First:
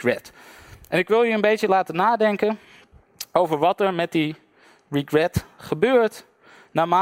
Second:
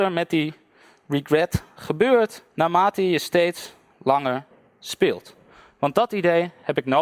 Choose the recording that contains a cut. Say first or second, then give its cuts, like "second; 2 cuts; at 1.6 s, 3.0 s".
second; 1 cut; at 2.5 s